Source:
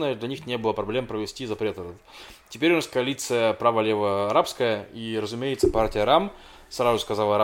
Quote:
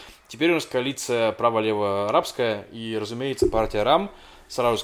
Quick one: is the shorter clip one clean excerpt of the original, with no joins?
yes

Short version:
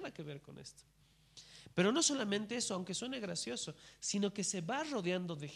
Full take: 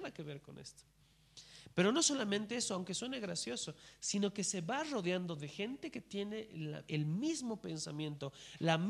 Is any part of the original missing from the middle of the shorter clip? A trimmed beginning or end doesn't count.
no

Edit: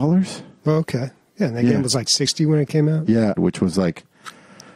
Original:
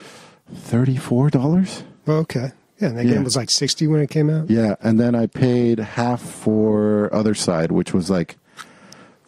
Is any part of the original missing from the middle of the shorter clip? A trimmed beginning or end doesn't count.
yes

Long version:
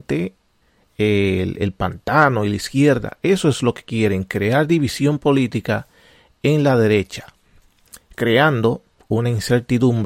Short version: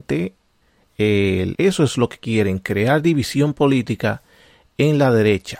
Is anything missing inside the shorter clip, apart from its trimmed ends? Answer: yes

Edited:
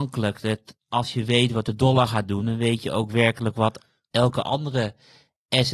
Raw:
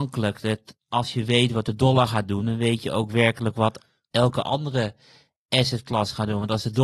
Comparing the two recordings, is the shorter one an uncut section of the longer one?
yes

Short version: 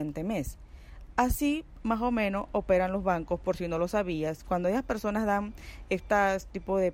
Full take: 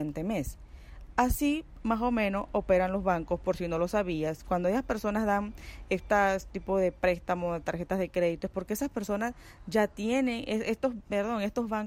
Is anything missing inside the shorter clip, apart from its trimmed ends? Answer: no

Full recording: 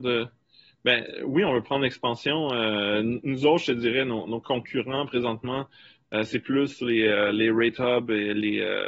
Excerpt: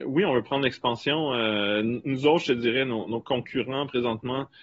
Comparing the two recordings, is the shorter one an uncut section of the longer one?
yes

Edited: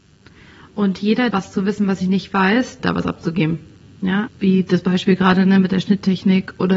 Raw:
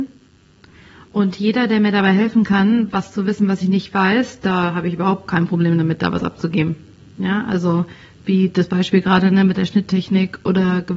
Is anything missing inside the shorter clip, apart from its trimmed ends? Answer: yes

